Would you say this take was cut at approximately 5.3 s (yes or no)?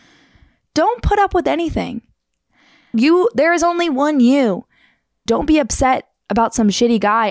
yes